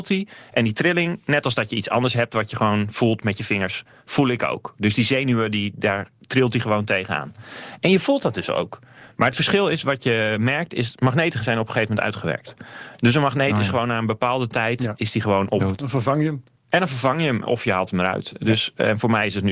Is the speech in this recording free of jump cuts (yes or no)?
yes